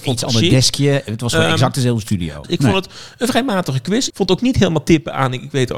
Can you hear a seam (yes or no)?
yes